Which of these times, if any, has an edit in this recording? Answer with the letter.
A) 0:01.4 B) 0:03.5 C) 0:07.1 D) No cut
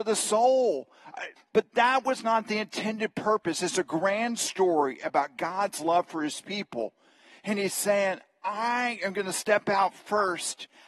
A